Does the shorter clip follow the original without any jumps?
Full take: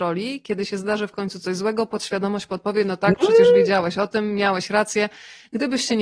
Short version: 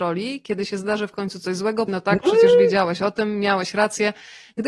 no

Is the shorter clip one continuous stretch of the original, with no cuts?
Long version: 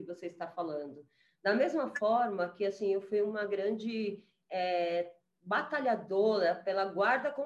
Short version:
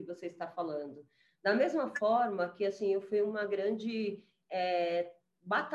yes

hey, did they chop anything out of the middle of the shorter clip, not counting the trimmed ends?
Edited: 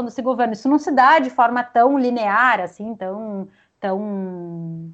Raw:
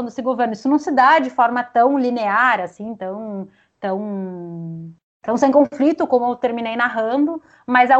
no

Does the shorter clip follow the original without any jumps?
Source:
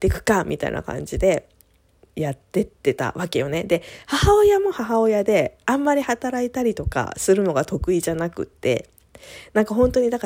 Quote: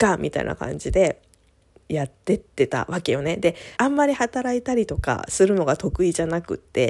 no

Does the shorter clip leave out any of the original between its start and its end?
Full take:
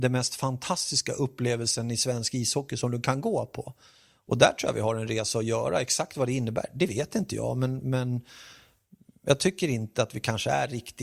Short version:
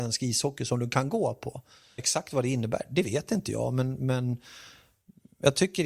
yes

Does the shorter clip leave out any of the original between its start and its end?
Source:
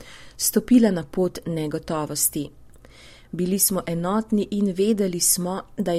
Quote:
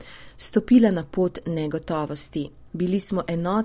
yes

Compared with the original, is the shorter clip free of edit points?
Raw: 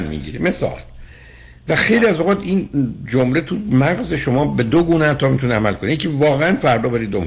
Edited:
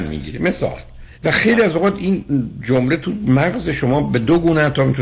no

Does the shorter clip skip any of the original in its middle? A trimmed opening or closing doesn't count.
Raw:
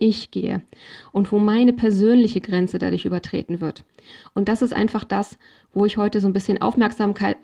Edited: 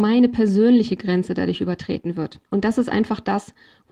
yes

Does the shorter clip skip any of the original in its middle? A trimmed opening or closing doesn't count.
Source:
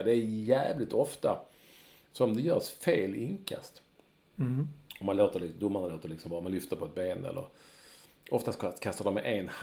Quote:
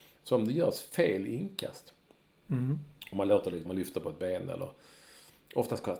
yes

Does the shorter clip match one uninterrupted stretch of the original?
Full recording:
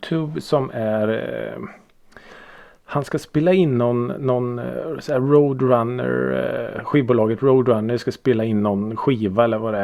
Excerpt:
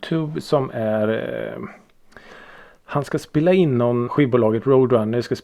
no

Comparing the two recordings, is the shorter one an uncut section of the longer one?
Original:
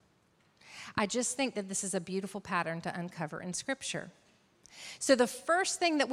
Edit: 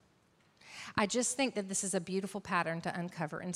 yes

